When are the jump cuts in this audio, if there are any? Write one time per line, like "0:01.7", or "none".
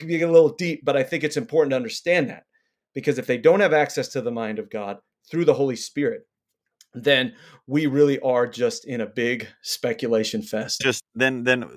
0:10.8